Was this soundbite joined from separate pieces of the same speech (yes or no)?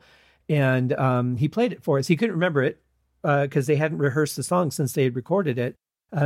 no